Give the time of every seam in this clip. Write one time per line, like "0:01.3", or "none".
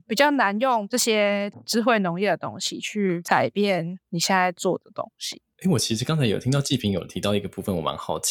none